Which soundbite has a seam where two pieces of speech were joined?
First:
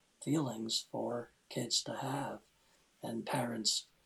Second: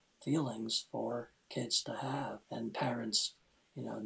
second; 1 cut; at 2.4 s

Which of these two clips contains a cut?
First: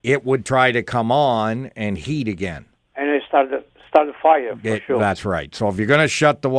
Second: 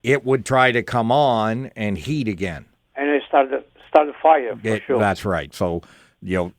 second; 1 cut; at 5.5 s

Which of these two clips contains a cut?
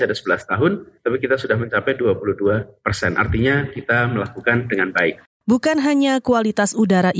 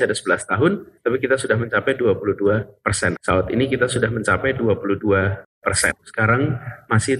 second; 2 cuts; at 3.1 s, 6.0 s

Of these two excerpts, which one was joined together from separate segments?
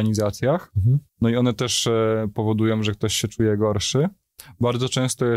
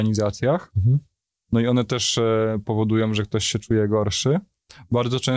first; 1 cut; at 1.1 s

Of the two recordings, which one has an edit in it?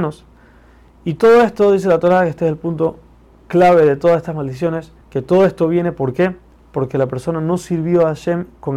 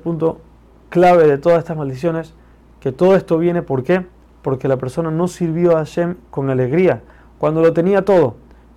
first; 1 cut; at 5.0 s

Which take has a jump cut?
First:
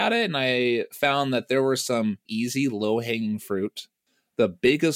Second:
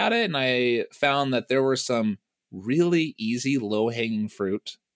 first; 1 cut; at 2.3 s

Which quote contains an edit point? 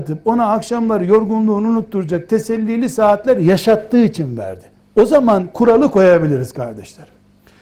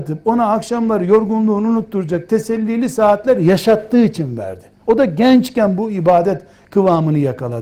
first; 1 cut; at 4.8 s

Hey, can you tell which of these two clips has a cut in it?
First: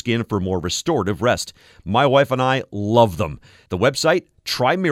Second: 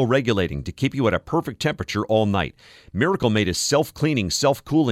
first; 1 cut; at 3.7 s

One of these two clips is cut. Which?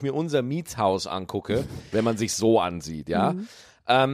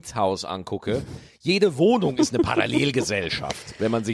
first; 1 cut; at 1.9 s

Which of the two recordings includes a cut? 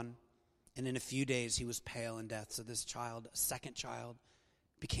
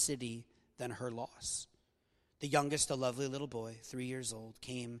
second; 1 cut; at 2.3 s

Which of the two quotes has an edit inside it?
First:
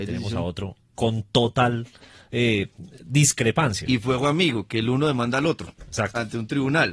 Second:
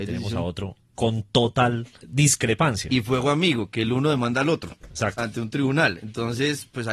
second; 1 cut; at 2.0 s

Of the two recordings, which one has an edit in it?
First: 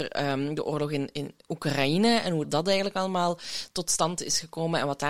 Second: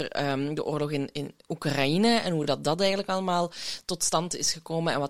first; 1 cut; at 2.4 s

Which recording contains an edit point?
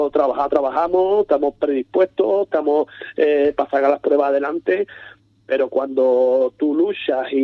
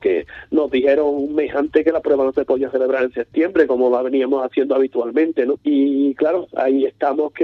second; 1 cut; at 5.5 s

